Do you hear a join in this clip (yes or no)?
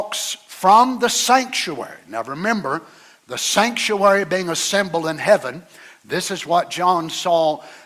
no